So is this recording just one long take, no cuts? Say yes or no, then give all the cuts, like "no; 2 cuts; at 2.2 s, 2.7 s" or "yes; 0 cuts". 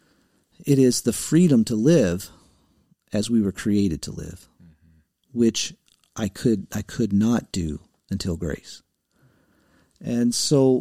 yes; 0 cuts